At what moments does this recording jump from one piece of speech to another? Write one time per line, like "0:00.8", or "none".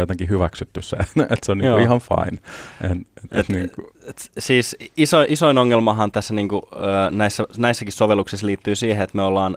0:06.1